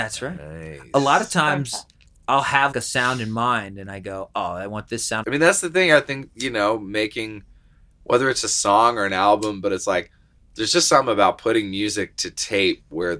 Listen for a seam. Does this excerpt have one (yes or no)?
yes